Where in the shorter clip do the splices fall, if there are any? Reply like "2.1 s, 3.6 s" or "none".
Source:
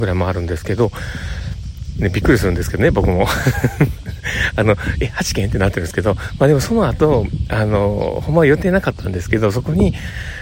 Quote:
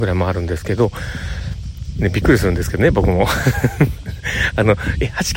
none

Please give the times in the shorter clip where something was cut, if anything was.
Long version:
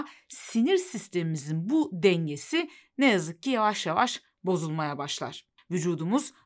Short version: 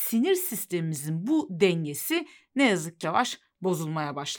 3.0 s

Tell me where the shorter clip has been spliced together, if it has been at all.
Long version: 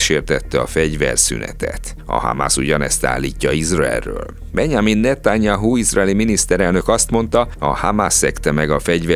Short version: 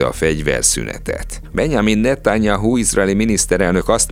1.5 s

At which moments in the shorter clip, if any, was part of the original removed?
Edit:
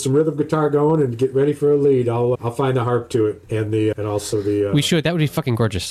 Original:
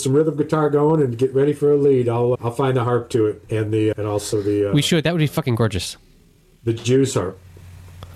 none

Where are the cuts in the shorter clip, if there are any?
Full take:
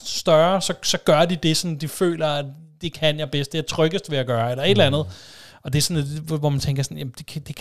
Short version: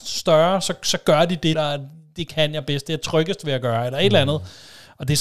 1.5 s

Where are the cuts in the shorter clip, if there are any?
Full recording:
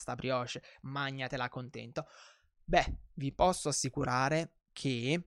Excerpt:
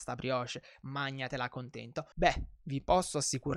2.1 s

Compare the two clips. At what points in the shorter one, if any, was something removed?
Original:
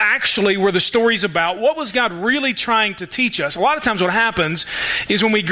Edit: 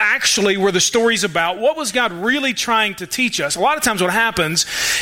none

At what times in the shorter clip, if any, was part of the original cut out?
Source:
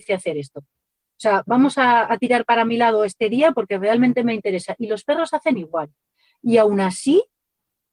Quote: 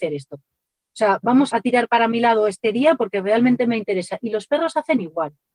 1.5 s

